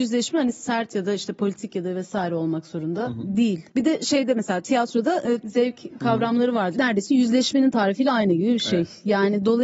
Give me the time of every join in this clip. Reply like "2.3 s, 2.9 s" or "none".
5.4 s, 6.7 s